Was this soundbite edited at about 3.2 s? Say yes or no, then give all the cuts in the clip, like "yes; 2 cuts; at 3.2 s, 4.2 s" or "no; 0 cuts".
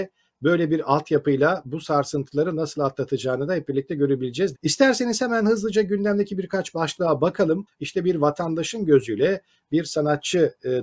no; 2 cuts; at 4.5 s, 7.7 s